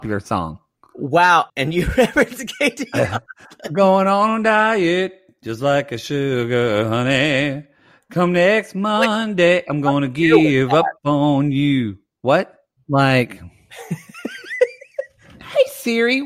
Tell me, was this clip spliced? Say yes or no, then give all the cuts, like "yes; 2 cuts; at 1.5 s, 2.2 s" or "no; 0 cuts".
yes; 2 cuts; at 1.5 s, 12.8 s